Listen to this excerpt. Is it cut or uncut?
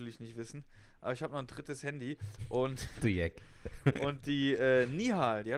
uncut